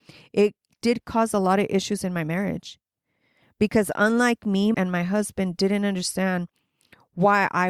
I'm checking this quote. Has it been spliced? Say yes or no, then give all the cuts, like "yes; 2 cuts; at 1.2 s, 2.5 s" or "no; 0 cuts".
yes; 1 cut; at 4.7 s